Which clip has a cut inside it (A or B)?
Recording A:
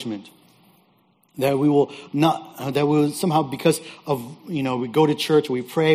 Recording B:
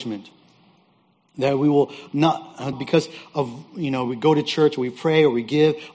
B